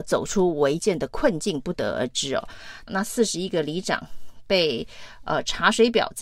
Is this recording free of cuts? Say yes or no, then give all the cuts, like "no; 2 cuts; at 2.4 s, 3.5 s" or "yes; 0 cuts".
no; 1 cut; at 2.9 s